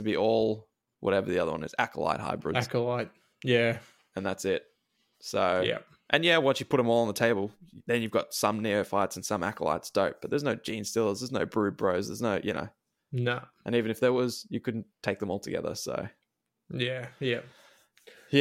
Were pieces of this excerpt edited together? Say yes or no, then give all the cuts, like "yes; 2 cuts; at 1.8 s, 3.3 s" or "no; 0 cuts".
no; 0 cuts